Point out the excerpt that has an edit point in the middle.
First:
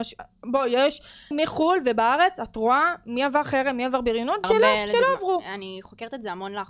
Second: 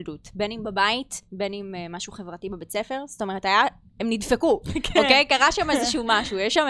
first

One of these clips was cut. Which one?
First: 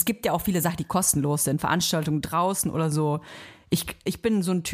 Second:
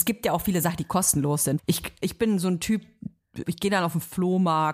second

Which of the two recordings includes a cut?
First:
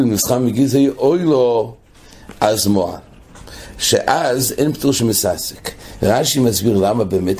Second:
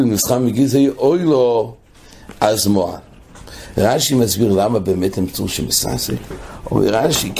second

